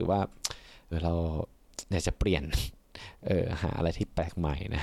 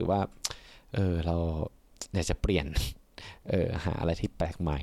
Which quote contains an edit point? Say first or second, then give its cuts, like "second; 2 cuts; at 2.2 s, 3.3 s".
first; 1 cut; at 0.9 s